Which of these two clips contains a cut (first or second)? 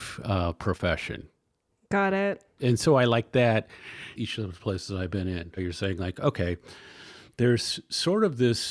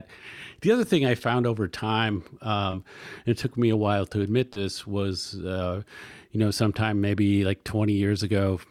first